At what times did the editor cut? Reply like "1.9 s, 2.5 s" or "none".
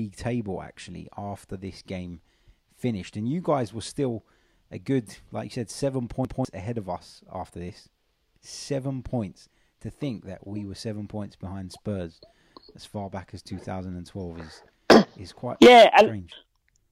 none